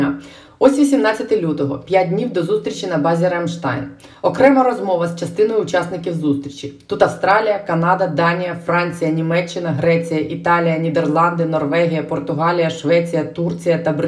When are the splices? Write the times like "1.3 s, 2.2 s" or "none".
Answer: none